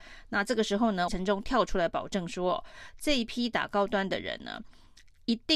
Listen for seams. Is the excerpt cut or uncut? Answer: cut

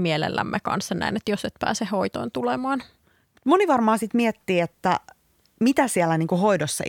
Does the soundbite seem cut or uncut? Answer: uncut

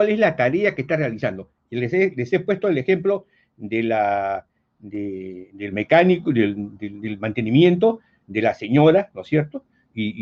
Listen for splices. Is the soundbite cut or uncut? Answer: uncut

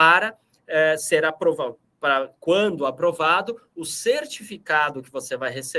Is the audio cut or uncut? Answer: cut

